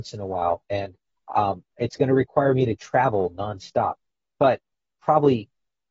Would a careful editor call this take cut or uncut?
uncut